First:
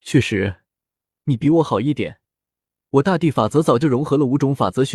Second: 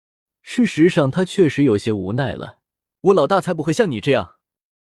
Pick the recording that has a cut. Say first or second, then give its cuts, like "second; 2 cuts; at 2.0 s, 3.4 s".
second; 1 cut; at 2.9 s